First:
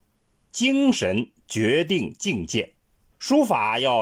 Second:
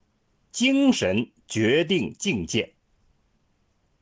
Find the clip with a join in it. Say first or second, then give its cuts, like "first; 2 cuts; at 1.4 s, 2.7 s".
first; 1 cut; at 3.1 s